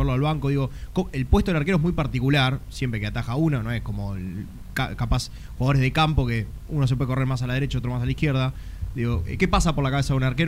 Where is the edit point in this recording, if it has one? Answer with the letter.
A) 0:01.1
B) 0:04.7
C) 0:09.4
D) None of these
C